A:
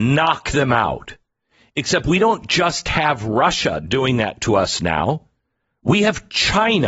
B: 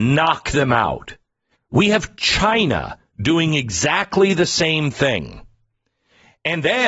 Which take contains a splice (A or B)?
B